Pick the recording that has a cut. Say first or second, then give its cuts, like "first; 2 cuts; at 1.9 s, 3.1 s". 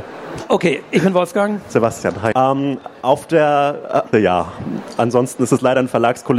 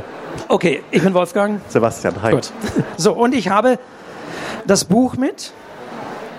first; 2 cuts; at 2.3 s, 4.1 s